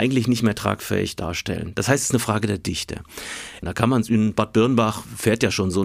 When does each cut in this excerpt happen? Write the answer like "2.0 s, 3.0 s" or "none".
3.6 s

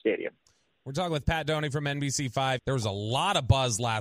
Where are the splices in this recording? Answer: 2.6 s

